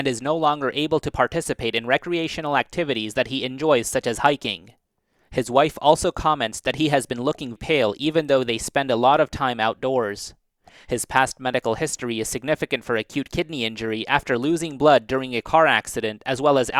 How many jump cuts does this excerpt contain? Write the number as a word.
one